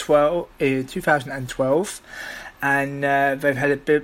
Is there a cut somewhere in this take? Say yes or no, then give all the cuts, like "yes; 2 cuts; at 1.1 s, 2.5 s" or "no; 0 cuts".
no; 0 cuts